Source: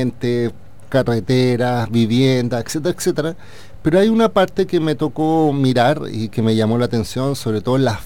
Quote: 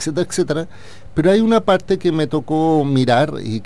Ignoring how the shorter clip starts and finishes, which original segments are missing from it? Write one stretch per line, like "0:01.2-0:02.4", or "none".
none